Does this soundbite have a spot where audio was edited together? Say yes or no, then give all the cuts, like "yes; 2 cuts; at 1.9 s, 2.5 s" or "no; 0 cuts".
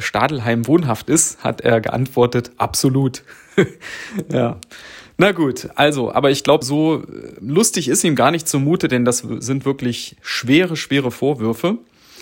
yes; 1 cut; at 6.6 s